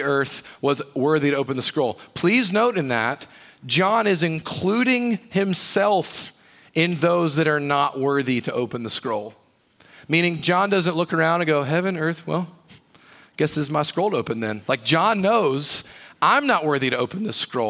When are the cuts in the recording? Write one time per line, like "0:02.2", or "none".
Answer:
none